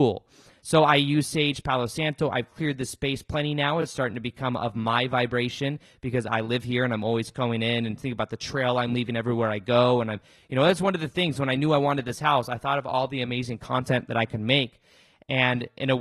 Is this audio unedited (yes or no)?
yes